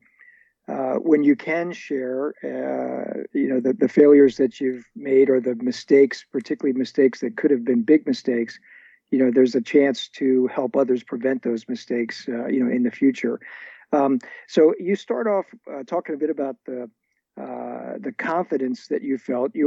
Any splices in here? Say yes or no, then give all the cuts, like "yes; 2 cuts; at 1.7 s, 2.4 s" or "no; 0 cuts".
no; 0 cuts